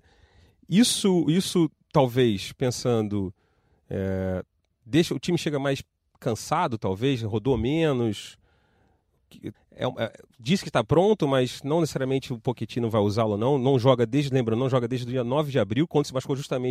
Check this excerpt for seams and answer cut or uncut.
cut